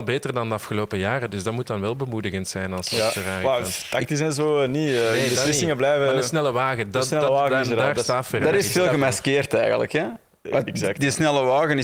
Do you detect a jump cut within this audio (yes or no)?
no